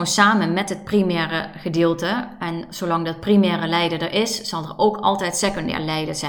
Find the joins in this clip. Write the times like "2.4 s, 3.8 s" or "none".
none